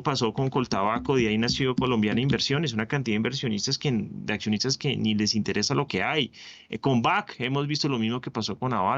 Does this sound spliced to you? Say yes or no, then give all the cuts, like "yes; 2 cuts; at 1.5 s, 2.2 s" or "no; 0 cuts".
no; 0 cuts